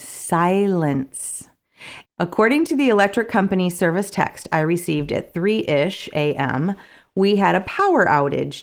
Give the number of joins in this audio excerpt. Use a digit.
1